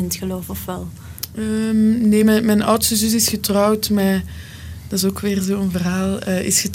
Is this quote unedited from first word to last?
yes; 0 cuts

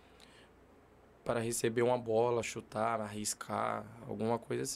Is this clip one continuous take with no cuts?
yes; 0 cuts

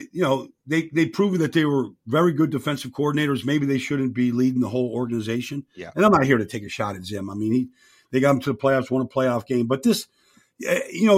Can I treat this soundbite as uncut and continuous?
yes; 0 cuts

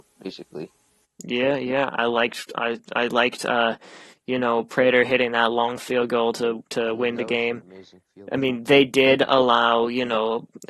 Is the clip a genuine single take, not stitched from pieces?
no; 1 cut; at 1.9 s

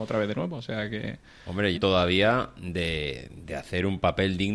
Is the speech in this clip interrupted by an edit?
yes; 1 cut; at 1.7 s

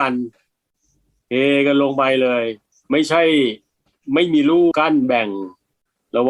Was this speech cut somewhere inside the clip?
yes; 1 cut; at 4.7 s

